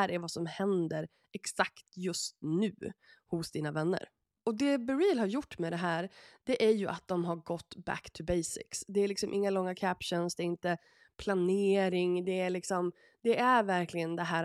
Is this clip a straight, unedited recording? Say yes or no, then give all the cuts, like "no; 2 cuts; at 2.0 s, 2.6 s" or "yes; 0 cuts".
yes; 0 cuts